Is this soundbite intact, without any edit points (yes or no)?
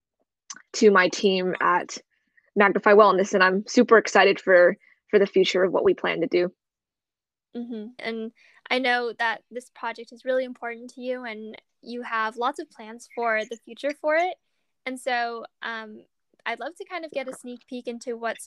no